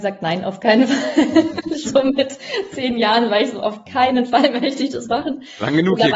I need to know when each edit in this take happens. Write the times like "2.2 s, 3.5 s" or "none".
1.8 s